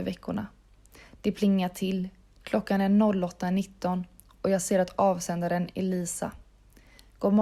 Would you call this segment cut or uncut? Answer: cut